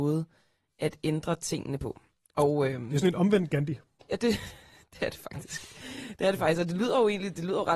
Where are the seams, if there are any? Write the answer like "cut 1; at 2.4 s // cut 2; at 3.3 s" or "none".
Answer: none